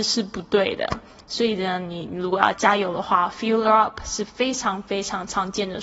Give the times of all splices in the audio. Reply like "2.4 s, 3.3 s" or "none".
2.5 s